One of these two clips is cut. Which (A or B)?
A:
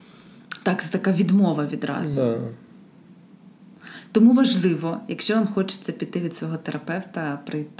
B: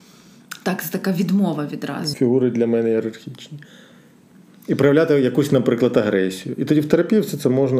B